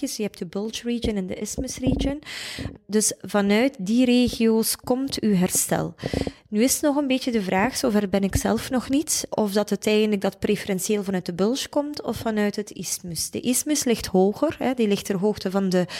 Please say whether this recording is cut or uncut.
uncut